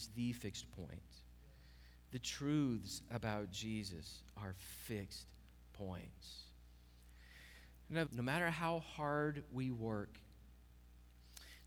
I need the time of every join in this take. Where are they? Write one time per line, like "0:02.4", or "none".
0:02.1
0:08.1